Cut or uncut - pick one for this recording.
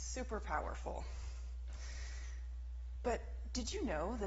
uncut